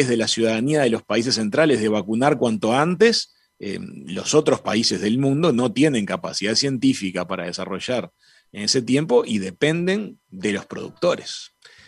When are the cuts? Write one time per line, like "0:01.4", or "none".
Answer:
none